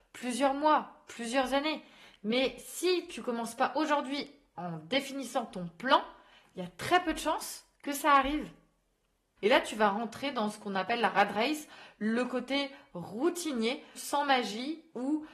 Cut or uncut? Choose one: cut